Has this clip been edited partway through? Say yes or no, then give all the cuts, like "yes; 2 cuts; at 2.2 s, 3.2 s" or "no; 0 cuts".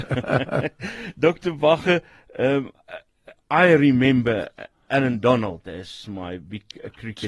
no; 0 cuts